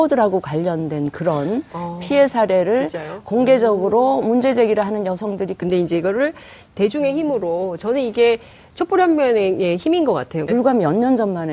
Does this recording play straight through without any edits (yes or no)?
no